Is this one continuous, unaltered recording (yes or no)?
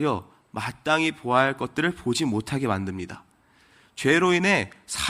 yes